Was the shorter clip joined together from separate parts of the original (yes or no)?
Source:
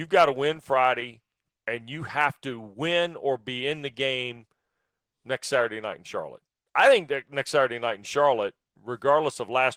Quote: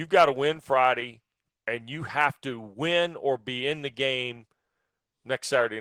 no